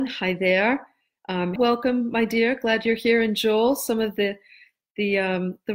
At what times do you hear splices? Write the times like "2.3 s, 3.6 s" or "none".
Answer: 1.6 s